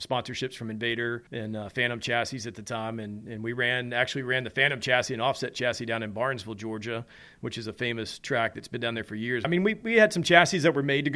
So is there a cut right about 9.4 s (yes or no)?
yes